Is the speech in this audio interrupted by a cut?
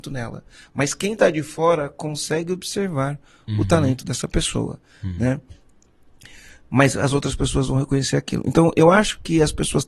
yes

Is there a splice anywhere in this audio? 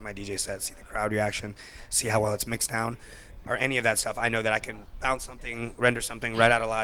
yes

